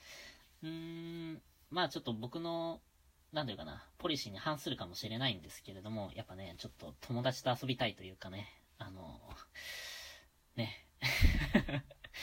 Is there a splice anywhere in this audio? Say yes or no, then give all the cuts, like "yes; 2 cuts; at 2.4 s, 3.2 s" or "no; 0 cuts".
no; 0 cuts